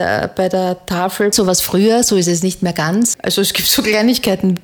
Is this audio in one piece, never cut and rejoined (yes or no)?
no